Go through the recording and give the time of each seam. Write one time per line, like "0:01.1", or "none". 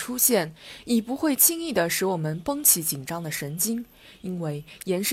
none